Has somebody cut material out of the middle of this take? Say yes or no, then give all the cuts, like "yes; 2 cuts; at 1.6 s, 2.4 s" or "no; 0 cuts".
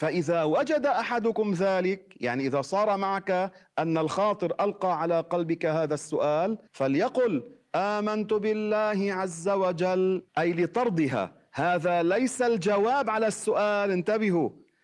yes; 2 cuts; at 6.7 s, 10.3 s